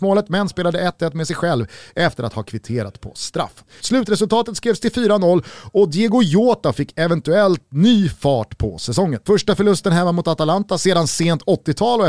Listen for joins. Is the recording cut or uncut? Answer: cut